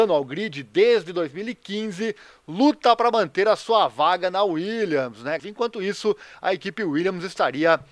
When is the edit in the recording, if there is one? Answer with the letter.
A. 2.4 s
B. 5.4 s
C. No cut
B